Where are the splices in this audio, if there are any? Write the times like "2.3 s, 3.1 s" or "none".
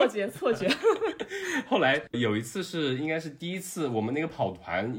2.1 s